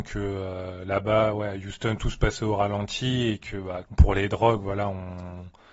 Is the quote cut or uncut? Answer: cut